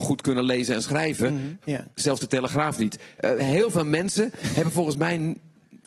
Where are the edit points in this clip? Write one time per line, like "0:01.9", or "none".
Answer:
0:01.6
0:03.2

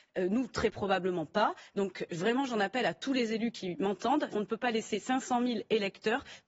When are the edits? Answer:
0:04.3

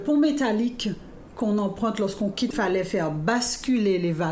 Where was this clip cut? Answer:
0:02.5

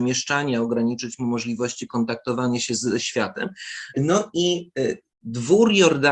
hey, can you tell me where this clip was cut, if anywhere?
0:03.9

